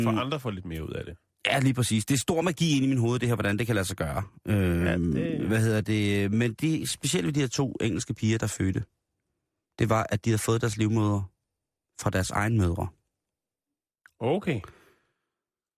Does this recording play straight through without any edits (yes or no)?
yes